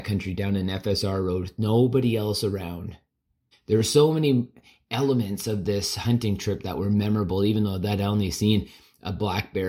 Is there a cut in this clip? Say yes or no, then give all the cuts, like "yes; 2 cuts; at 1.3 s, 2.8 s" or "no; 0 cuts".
yes; 1 cut; at 3.5 s